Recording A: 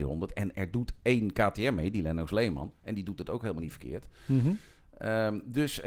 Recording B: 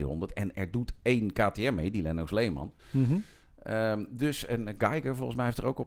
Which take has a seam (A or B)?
B